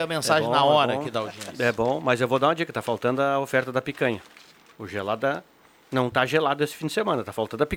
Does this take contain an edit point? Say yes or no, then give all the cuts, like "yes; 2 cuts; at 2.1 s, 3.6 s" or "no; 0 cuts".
no; 0 cuts